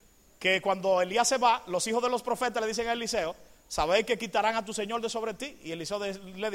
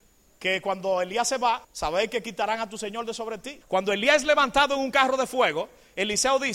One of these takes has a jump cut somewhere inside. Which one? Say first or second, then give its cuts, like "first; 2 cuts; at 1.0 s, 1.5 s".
second; 2 cuts; at 1.6 s, 3.6 s